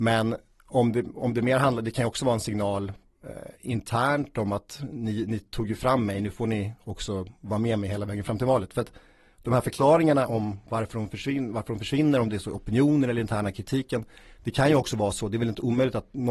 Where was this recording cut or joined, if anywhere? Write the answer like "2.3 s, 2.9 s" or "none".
none